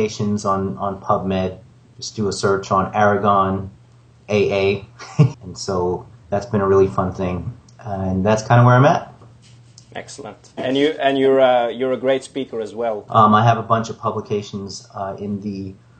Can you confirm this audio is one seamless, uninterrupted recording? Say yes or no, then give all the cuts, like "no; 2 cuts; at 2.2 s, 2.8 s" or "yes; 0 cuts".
no; 2 cuts; at 5.3 s, 13.1 s